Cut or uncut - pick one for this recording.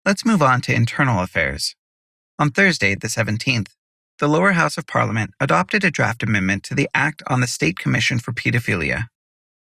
uncut